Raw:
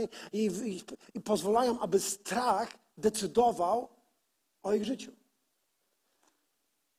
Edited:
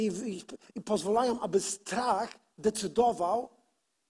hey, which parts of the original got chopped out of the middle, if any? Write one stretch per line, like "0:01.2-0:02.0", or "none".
none